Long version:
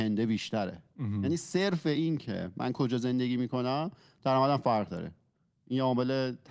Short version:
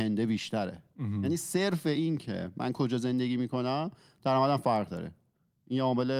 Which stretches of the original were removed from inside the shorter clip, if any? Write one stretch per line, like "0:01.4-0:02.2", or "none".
none